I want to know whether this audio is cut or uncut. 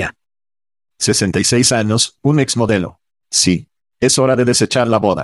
uncut